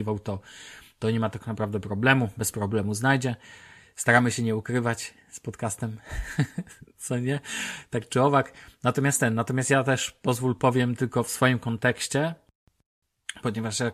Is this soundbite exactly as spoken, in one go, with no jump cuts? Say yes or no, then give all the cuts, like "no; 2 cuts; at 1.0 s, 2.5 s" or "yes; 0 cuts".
yes; 0 cuts